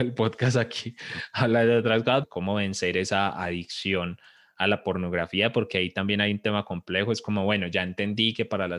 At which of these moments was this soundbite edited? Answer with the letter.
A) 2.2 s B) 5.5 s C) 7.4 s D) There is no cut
A